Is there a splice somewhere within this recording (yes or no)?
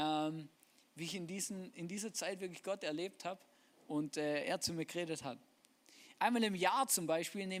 no